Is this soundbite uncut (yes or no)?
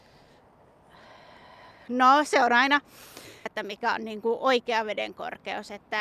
no